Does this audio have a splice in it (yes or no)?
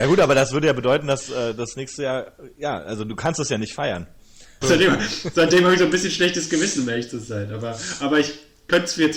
yes